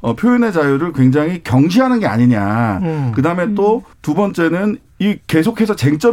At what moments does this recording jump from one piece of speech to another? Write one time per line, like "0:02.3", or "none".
0:03.9